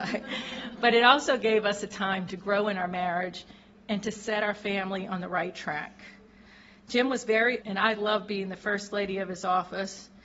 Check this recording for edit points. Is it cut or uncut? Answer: cut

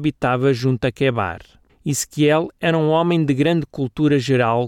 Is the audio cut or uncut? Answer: cut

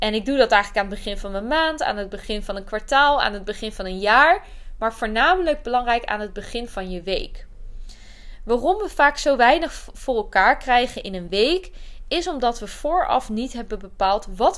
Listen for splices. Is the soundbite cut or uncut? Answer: uncut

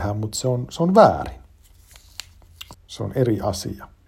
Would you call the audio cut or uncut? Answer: cut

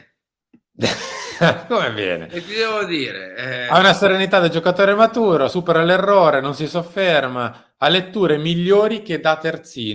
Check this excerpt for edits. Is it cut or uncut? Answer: uncut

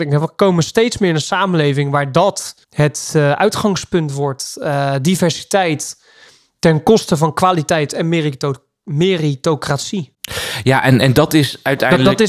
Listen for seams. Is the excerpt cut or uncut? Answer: cut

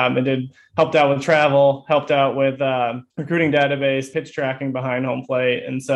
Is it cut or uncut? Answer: cut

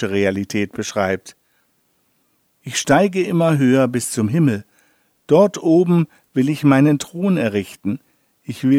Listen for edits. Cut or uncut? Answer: uncut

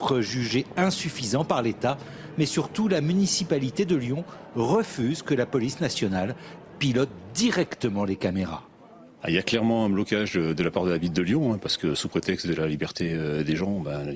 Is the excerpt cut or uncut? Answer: uncut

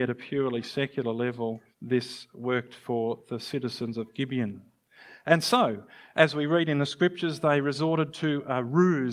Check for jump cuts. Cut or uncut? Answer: cut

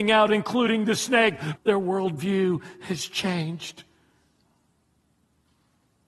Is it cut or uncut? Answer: cut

